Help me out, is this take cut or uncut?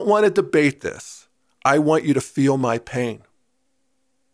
uncut